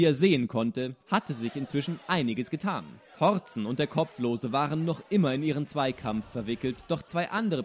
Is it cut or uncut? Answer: uncut